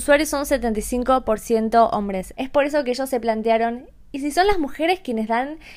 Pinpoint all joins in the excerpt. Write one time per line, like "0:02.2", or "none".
0:02.3